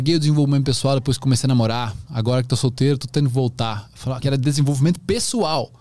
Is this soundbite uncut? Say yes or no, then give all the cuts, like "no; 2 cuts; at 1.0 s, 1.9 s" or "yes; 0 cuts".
no; 1 cut; at 4.2 s